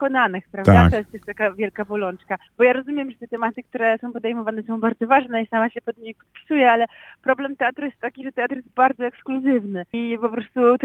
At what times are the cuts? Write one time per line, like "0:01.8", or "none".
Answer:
none